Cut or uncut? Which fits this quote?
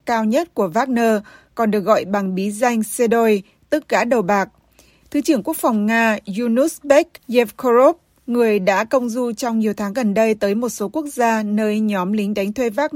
cut